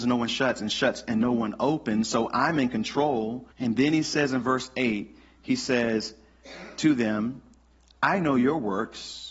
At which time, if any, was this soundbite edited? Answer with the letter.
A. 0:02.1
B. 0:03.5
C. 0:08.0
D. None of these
B